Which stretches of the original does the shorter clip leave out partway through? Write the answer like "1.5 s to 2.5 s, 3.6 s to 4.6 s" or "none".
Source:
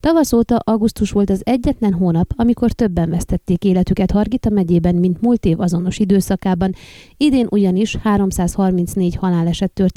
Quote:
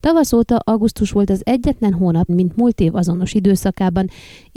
2.3 s to 4.9 s